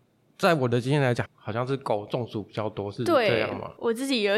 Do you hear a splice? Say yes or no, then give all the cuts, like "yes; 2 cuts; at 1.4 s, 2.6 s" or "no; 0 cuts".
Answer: yes; 1 cut; at 1.3 s